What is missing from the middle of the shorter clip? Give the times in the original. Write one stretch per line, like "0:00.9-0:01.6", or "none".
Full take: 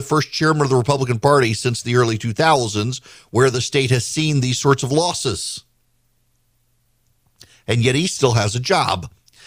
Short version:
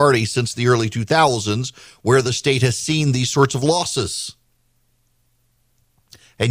none